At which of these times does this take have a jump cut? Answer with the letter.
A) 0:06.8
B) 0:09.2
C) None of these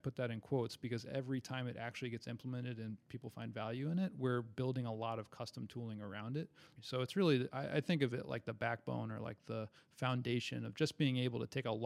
A